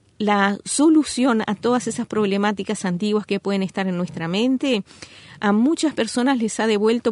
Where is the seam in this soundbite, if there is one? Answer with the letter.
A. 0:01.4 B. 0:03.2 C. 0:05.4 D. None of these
D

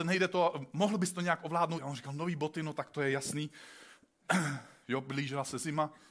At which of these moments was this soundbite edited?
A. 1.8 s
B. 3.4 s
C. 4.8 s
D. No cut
A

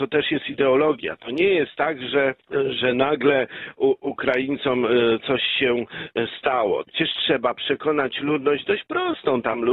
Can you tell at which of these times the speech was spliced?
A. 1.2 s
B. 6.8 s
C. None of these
B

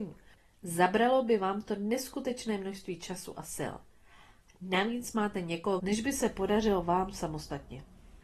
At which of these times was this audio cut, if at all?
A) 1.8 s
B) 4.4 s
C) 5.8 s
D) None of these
C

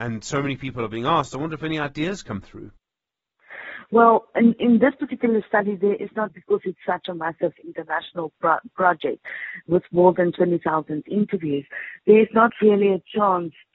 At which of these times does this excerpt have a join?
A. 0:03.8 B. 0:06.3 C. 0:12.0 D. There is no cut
B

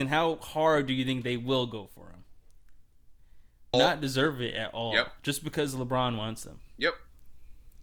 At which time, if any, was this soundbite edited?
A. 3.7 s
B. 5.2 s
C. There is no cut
A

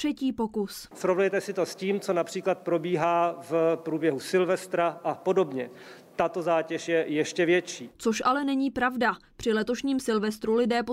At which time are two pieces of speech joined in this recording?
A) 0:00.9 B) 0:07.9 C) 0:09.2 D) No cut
A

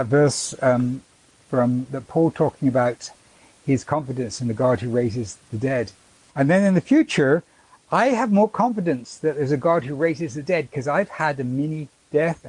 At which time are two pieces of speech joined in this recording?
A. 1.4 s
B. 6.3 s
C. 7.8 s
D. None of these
B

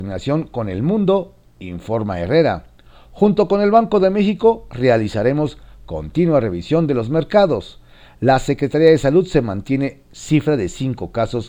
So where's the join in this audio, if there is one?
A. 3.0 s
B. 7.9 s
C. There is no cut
C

